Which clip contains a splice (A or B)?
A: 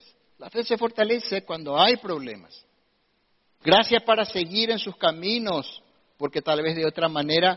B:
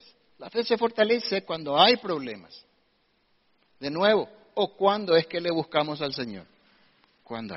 A